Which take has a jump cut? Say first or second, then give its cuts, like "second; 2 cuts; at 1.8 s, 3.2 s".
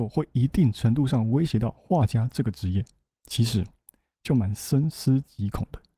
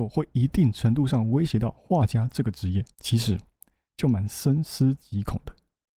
second; 1 cut; at 2.9 s